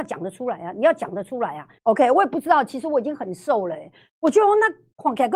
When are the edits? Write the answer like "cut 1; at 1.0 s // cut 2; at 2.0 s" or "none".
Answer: cut 1; at 1.8 s